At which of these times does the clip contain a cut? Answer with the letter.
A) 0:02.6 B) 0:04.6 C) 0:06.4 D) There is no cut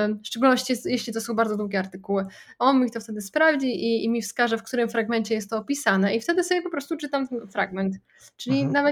D